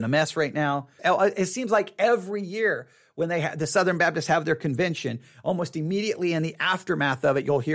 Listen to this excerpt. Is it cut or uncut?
cut